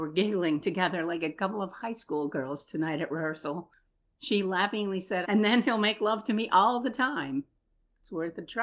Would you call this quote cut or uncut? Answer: cut